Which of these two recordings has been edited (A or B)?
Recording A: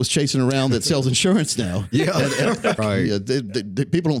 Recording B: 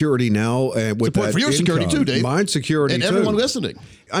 A